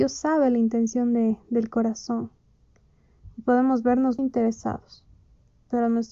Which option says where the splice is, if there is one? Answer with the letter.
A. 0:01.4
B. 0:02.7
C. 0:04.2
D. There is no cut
C